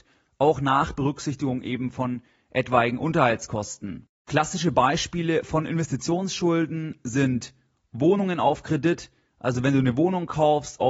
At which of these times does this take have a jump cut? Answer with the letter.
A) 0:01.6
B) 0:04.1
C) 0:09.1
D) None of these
D